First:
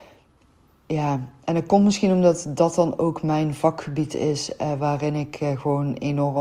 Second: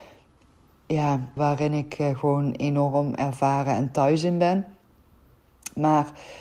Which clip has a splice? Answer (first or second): second